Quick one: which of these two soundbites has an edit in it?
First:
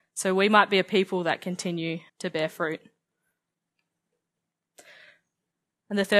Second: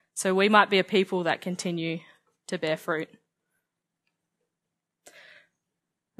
first; 1 cut; at 2.1 s

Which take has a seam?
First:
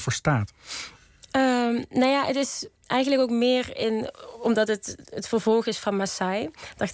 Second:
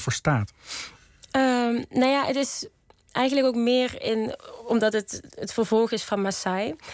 first; 1 cut; at 2.8 s

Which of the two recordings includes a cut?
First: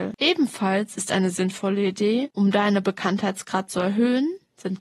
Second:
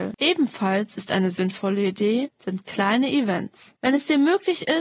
second; 1 cut; at 2.3 s

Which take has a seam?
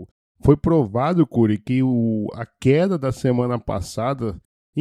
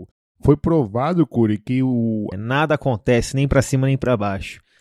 second; 1 cut; at 2.3 s

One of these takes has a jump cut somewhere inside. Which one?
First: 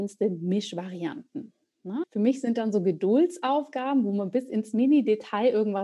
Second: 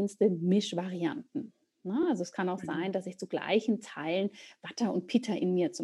first; 1 cut; at 2.0 s

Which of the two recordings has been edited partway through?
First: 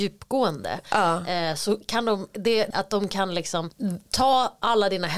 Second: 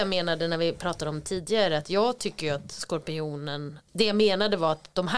first; 1 cut; at 2.7 s

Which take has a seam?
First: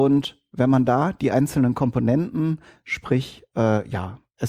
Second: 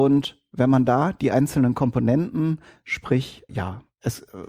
second; 1 cut; at 3.5 s

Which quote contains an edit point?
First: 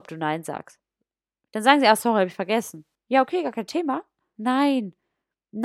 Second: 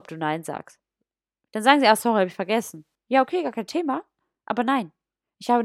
first; 1 cut; at 4.3 s

